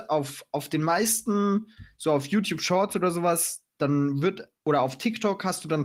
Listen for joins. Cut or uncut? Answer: cut